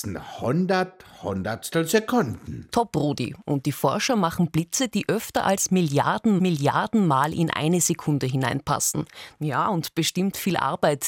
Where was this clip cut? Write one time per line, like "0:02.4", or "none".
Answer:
0:09.4